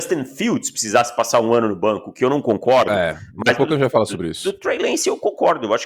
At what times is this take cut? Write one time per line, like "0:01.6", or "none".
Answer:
none